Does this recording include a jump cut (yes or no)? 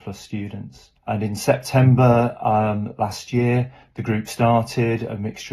yes